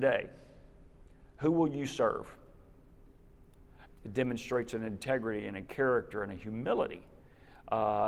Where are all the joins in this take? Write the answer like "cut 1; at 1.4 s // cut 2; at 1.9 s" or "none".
cut 1; at 3.9 s